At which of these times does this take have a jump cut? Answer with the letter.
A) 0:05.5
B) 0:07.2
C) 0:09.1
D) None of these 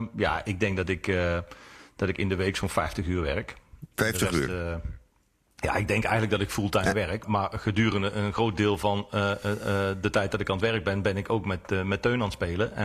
B